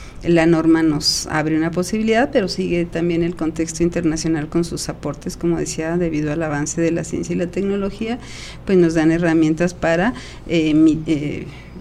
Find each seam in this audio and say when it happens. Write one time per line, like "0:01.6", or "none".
none